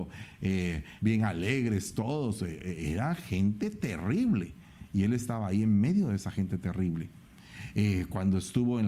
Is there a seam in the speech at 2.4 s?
no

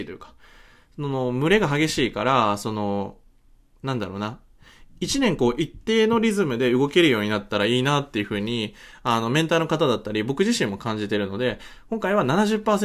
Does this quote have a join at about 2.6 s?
no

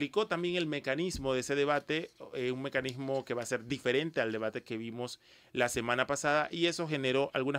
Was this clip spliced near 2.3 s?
no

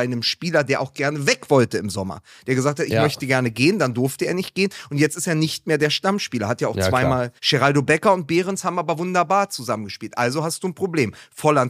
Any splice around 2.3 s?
no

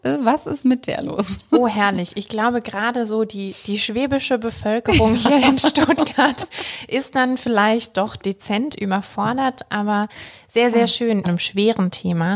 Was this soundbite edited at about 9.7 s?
no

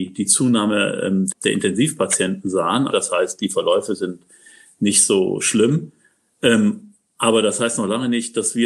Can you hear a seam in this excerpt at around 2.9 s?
yes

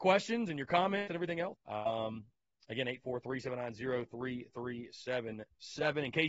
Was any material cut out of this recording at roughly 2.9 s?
no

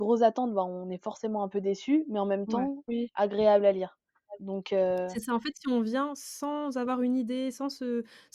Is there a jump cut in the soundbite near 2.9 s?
yes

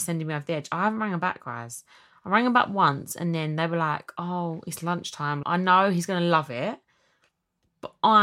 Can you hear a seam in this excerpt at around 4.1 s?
no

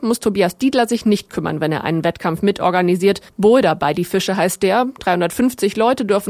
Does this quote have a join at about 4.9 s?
no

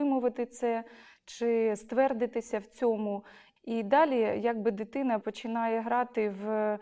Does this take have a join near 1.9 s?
no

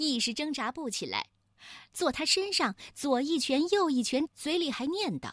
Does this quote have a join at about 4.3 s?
yes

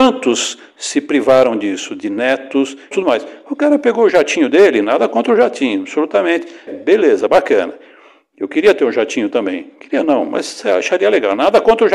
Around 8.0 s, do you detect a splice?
no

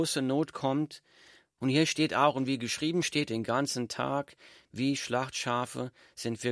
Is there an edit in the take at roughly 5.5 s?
no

